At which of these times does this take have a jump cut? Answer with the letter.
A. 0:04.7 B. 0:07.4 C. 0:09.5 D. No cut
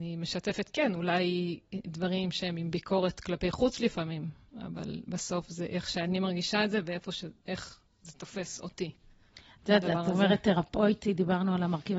D